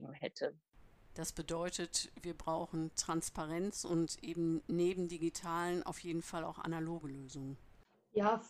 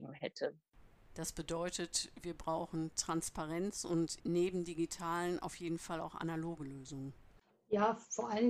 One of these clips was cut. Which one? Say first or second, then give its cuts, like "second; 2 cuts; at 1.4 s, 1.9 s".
second; 1 cut; at 4.2 s